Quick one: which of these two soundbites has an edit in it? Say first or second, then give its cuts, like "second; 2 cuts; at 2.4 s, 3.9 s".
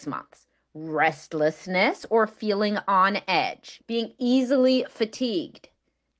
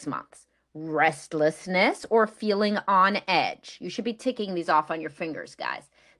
first; 1 cut; at 3.8 s